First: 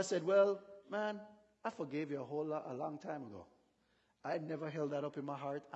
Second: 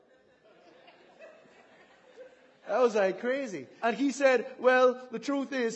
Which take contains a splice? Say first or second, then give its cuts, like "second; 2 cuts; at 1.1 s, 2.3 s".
second; 2 cuts; at 2.6 s, 3.8 s